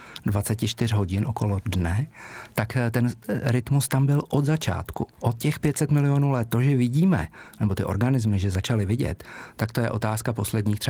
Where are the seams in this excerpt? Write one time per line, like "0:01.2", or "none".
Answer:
0:05.1